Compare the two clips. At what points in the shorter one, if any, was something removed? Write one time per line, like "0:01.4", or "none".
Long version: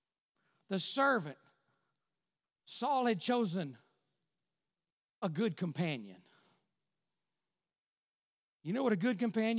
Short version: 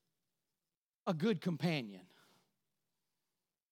none